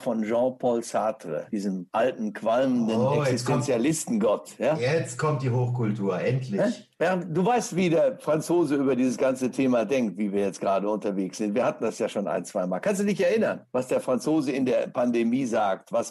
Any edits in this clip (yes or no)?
no